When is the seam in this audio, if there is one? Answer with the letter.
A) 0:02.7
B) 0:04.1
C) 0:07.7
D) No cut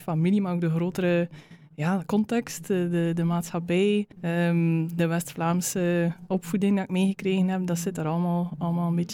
B